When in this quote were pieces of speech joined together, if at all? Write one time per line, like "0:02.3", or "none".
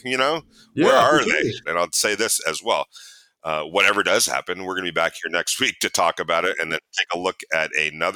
0:01.7